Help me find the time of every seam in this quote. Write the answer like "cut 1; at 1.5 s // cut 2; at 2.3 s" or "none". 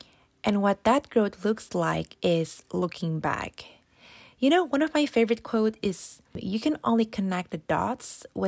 none